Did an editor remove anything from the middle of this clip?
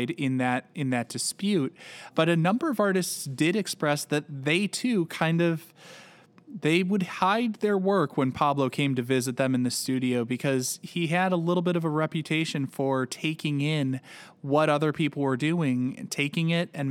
yes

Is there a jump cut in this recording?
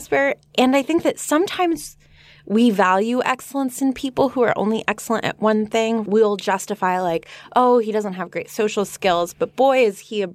no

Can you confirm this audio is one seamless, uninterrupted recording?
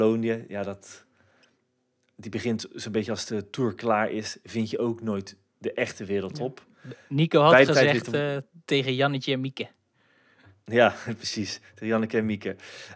yes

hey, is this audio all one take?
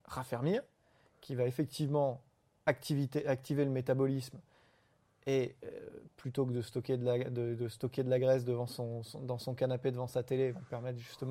yes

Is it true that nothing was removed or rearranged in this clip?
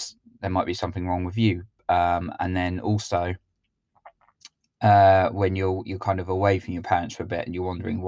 yes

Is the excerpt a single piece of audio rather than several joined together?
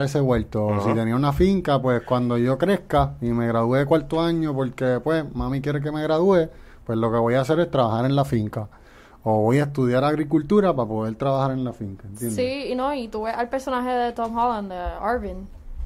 yes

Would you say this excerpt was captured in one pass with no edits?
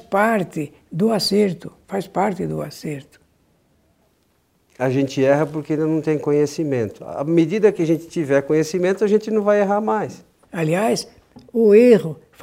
no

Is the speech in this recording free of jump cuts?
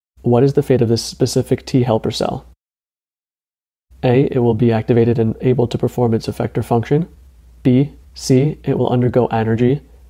no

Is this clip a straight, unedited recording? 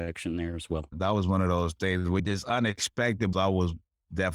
no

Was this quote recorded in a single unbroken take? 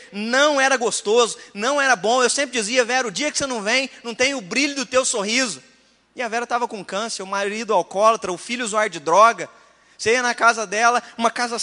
yes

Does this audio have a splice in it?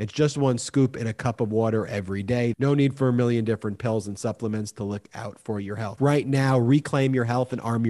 yes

